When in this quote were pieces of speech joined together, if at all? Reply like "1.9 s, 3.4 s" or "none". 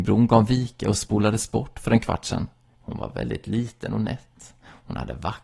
2.7 s